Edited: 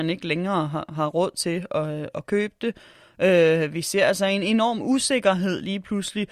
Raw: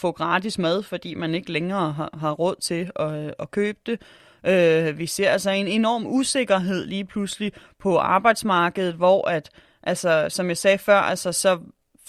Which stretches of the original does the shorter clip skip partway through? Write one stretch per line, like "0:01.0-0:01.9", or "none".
none